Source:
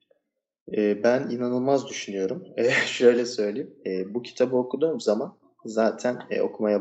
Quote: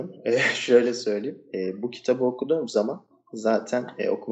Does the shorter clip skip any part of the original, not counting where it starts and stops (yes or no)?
no